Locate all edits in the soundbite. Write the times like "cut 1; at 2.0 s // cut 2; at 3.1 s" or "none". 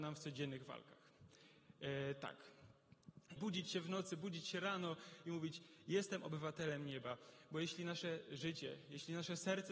cut 1; at 3.4 s